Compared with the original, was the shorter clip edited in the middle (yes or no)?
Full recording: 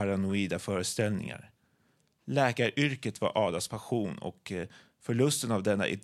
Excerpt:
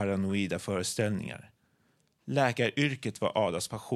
no